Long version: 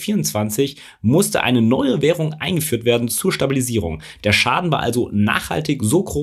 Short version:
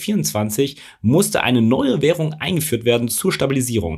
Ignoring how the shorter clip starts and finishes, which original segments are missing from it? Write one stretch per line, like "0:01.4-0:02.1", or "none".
none